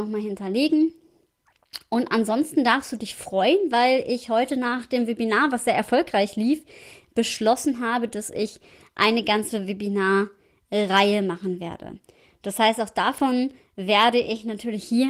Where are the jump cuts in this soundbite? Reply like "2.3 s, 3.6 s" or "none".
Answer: none